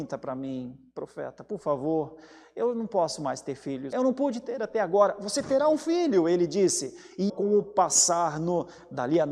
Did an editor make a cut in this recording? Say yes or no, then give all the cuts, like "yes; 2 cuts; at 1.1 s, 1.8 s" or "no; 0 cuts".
yes; 2 cuts; at 3.9 s, 7.3 s